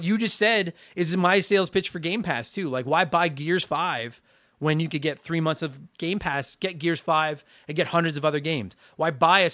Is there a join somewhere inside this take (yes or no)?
no